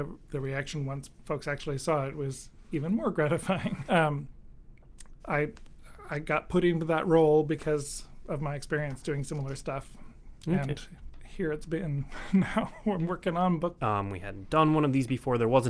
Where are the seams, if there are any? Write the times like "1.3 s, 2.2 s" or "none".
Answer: 3.9 s, 5.2 s, 13.8 s